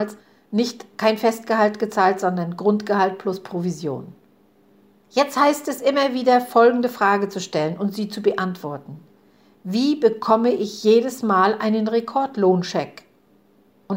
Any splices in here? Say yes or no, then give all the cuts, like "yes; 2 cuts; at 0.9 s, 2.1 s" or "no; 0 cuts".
no; 0 cuts